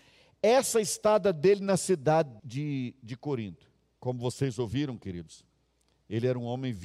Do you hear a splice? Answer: yes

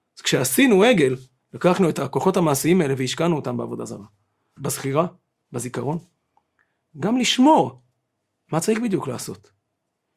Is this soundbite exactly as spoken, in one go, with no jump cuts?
no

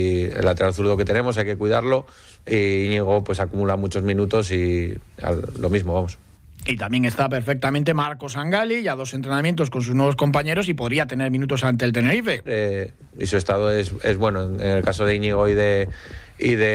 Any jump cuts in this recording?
yes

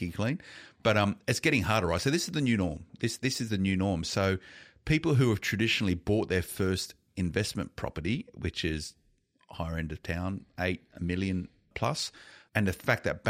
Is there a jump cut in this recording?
no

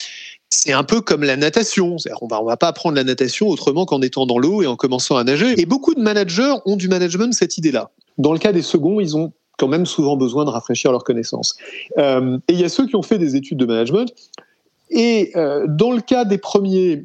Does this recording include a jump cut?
yes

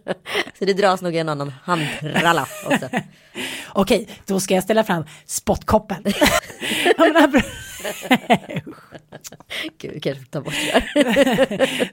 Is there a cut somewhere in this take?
yes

